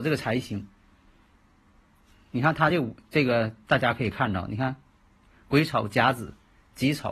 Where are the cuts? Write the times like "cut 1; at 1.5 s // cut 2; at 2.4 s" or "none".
none